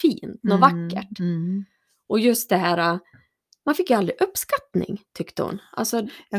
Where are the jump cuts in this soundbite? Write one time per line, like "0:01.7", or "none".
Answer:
none